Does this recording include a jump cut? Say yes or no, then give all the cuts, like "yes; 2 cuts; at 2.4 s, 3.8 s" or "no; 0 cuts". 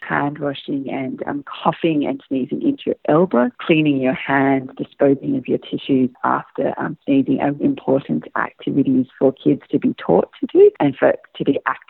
yes; 2 cuts; at 1.4 s, 7.6 s